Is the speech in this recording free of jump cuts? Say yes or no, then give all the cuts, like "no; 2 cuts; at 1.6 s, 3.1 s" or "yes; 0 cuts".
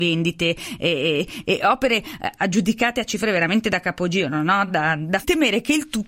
yes; 0 cuts